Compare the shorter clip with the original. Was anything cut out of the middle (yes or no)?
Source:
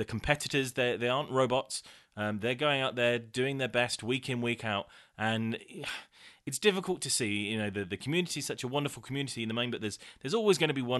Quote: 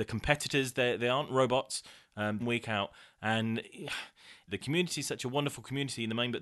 yes